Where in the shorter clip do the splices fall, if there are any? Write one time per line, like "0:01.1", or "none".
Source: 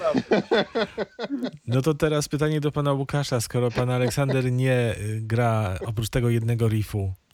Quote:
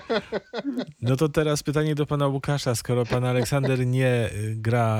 none